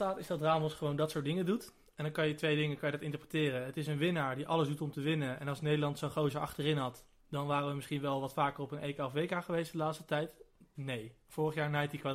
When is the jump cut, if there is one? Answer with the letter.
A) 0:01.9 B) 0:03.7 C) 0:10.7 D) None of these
C